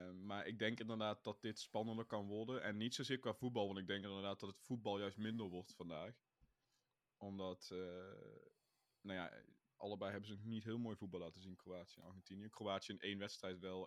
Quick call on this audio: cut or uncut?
uncut